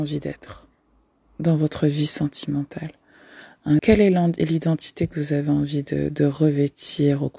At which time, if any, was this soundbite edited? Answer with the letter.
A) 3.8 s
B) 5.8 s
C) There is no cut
A